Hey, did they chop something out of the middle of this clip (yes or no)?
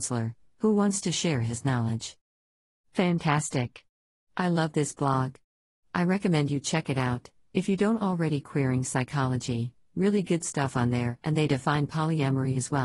no